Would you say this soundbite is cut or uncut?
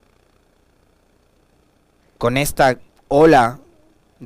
uncut